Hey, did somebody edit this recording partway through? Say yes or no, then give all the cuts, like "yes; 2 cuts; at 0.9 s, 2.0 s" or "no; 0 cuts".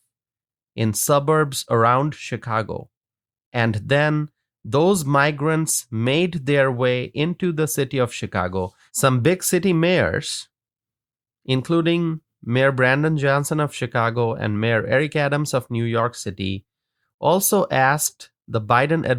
yes; 1 cut; at 8.9 s